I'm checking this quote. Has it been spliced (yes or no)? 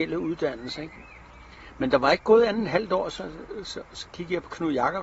no